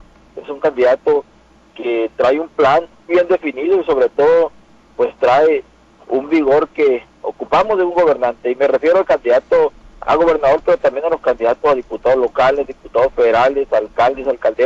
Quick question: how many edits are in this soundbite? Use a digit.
1